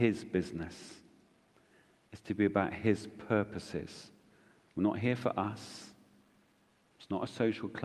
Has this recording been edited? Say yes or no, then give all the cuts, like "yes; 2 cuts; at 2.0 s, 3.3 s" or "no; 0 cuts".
no; 0 cuts